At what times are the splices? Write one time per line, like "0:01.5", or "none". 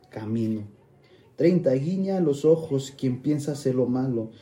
none

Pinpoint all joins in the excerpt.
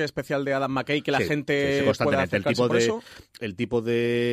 none

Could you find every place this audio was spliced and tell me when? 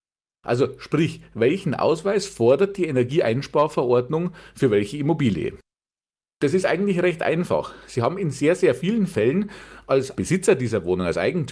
none

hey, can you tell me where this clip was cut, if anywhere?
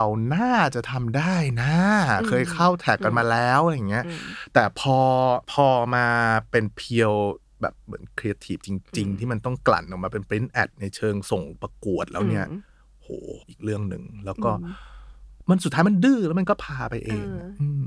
0:05.4
0:13.4

